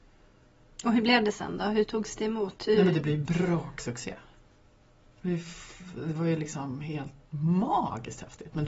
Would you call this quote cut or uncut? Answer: uncut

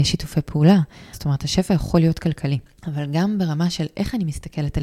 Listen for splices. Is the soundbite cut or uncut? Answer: cut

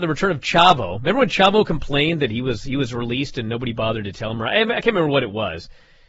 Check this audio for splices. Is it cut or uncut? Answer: uncut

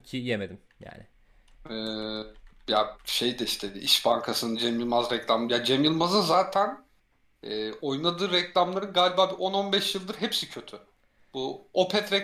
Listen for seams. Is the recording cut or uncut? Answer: uncut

